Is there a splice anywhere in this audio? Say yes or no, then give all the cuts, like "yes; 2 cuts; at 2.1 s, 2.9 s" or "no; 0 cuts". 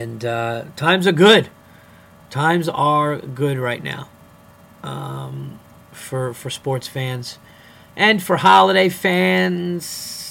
no; 0 cuts